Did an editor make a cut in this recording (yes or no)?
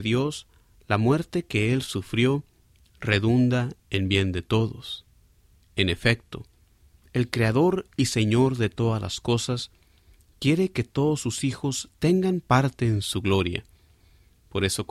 no